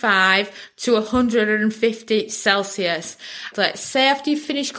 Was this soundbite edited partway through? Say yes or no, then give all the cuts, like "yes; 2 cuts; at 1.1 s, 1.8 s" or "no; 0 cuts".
yes; 1 cut; at 3.5 s